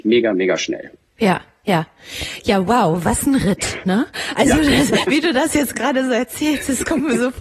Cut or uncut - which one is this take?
uncut